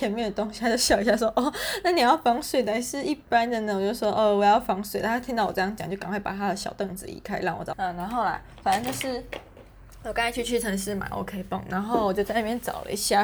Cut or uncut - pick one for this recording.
cut